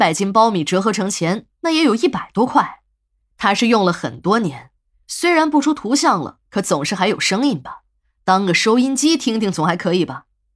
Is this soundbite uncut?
yes; 0 cuts

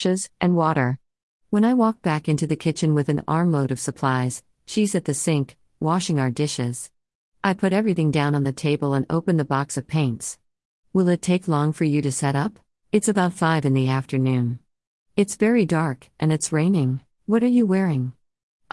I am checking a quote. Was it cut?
yes; 2 cuts; at 12.8 s, 17.1 s

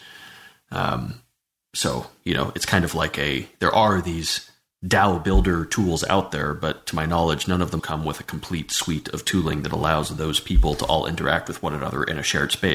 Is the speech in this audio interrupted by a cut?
yes; 1 cut; at 7.8 s

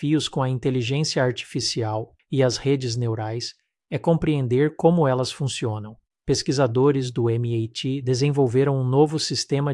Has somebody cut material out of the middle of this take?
yes; 1 cut; at 2.2 s

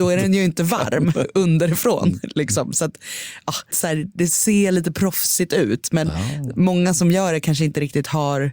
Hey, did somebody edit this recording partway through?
yes; 1 cut; at 3.7 s

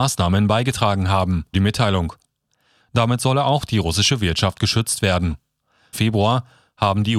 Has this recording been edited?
yes; 2 cuts; at 1.5 s, 5.9 s

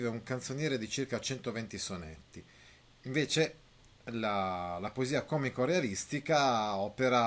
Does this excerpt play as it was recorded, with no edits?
no; 1 cut; at 2.8 s

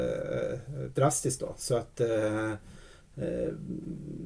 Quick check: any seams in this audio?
no; 0 cuts

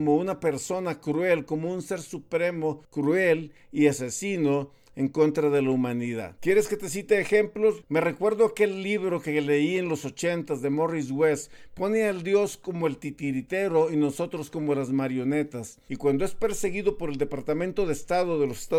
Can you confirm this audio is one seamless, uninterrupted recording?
no; 3 cuts; at 6.4 s, 7.8 s, 15.9 s

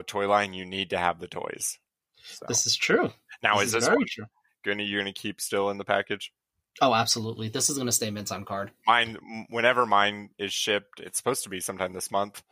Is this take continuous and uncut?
yes; 0 cuts

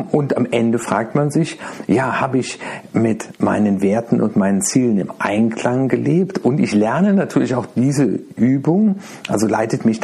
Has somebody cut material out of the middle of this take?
no; 0 cuts

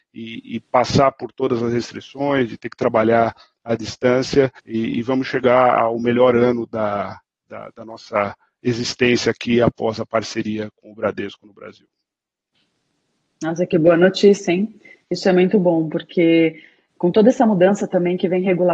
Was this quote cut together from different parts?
yes; 1 cut; at 4.6 s

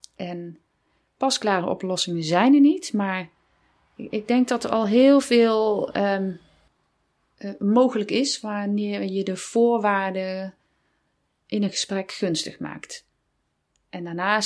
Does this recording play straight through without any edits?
yes; 0 cuts

